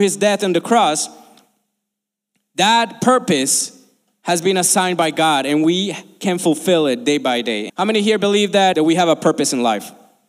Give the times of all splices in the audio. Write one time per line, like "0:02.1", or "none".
0:07.7
0:08.7